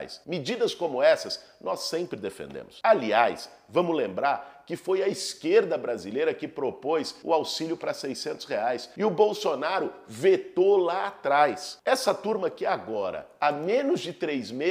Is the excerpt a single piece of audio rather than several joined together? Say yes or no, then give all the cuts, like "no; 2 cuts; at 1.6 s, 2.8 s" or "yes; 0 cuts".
yes; 0 cuts